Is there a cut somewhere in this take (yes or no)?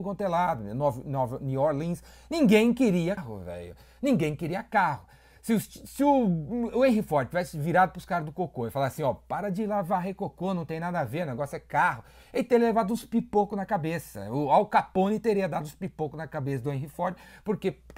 yes